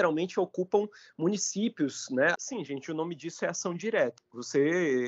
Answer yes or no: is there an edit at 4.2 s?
yes